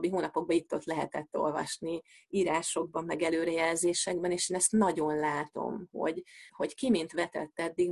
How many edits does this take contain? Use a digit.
1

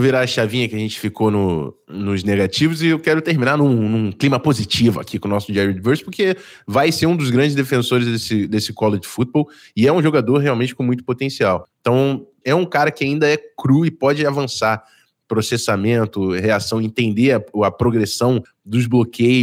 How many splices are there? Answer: 1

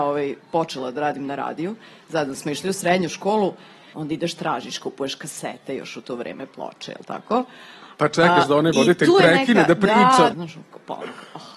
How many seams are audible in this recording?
2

